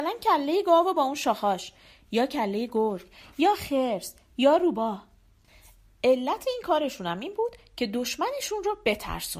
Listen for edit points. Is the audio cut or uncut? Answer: uncut